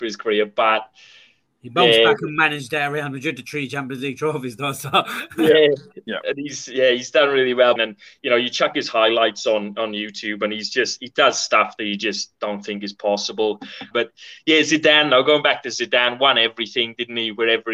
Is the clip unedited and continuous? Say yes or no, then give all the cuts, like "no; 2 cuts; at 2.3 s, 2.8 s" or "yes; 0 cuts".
no; 2 cuts; at 7.8 s, 13.9 s